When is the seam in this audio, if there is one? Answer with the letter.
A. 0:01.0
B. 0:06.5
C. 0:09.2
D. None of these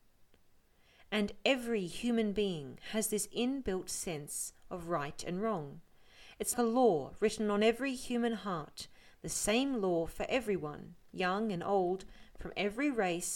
B